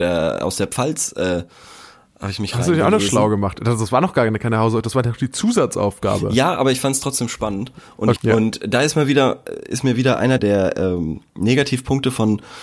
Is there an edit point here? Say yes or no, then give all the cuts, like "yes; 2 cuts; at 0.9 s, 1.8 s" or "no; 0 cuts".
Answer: yes; 2 cuts; at 8.2 s, 10.4 s